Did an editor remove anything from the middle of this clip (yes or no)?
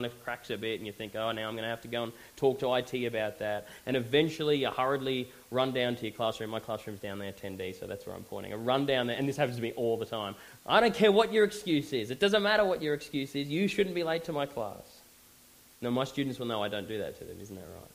yes